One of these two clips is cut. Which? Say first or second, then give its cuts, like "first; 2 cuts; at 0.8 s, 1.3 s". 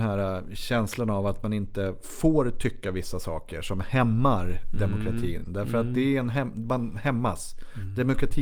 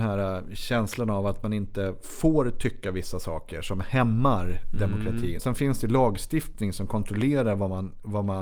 second; 1 cut; at 5.4 s